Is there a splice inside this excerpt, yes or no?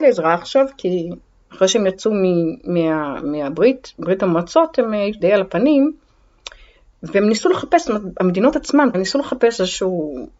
yes